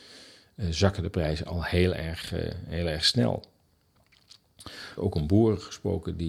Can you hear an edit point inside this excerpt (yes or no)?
yes